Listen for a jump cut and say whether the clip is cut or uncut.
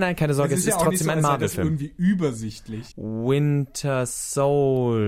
cut